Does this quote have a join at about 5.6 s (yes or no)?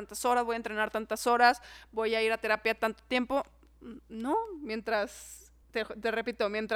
yes